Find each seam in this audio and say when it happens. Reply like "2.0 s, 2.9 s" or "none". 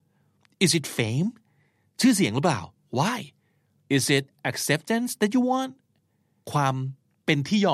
none

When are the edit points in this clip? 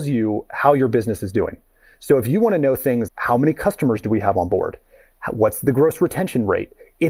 3.1 s

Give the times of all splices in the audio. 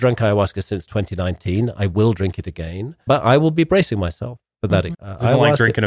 3.1 s, 4.9 s

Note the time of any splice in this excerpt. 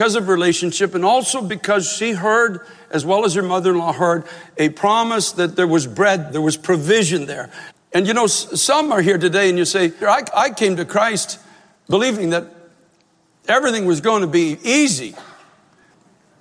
6.3 s, 7.7 s, 10.0 s

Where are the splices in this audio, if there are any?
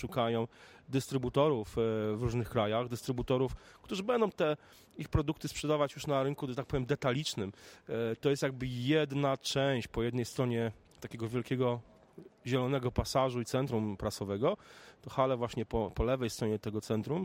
none

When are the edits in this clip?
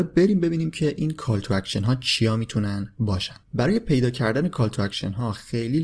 3.4 s

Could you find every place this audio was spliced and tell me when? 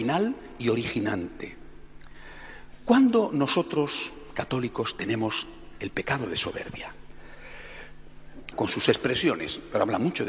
8.5 s

